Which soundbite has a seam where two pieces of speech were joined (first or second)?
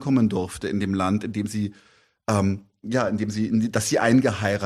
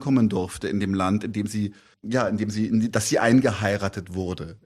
second